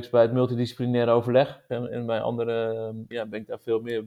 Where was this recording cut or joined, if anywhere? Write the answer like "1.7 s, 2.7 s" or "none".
1.7 s, 3.1 s